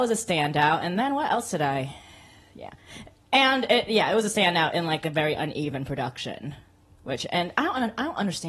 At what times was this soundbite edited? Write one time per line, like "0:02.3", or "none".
none

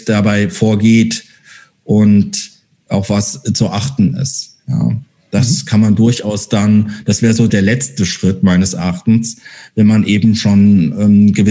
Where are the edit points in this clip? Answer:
0:07.5

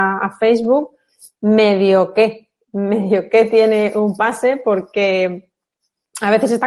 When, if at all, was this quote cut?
none

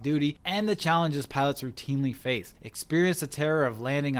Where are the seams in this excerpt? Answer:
0:02.6

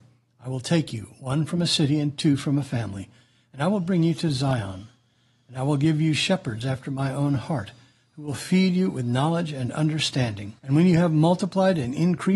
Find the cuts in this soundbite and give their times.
0:10.6

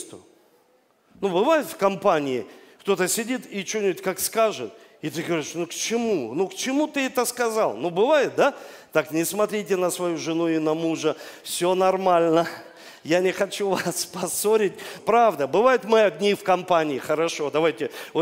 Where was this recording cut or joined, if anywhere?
0:15.0

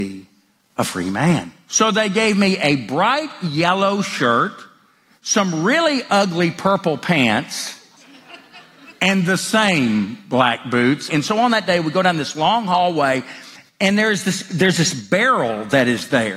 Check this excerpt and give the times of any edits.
0:01.7
0:11.1

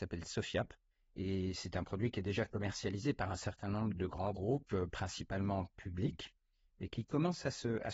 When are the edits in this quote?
0:04.0

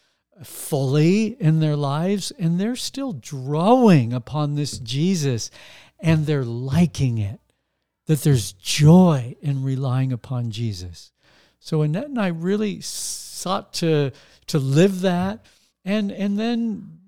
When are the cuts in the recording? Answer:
none

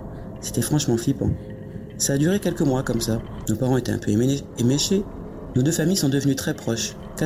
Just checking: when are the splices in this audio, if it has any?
0:03.5
0:05.5

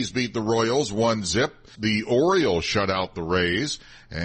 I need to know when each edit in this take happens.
0:01.7

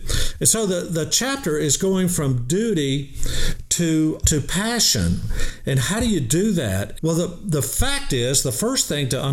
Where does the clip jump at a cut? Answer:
0:04.2
0:06.9

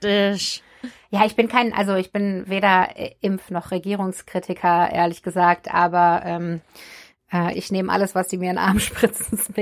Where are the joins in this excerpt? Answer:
0:07.5

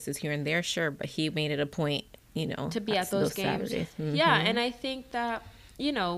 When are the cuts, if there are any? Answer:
none

